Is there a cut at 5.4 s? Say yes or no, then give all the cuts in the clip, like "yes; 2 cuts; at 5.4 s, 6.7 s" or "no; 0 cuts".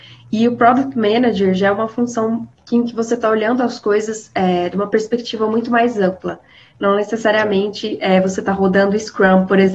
no; 0 cuts